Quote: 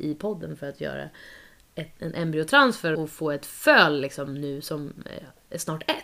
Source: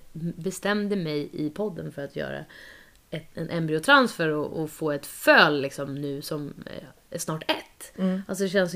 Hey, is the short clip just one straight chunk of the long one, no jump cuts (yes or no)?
no